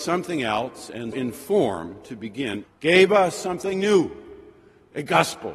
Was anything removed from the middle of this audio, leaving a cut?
yes; 2 cuts; at 1.1 s, 2.6 s

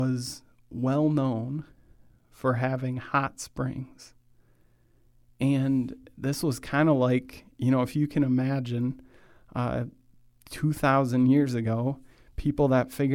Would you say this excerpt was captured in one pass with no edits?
yes; 0 cuts

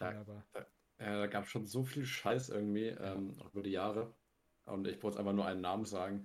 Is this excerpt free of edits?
yes; 0 cuts

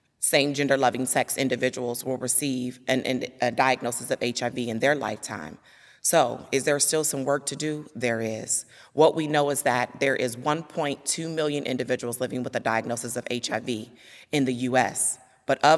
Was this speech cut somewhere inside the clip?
no; 0 cuts

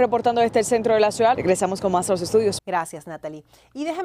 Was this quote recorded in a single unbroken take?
no; 2 cuts; at 1.3 s, 2.6 s

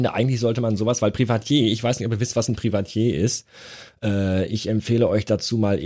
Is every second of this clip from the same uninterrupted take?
yes; 0 cuts

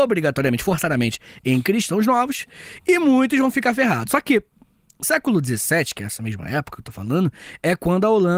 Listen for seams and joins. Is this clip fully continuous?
yes; 0 cuts

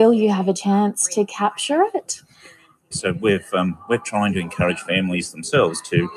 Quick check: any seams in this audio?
yes; 1 cut; at 2.9 s

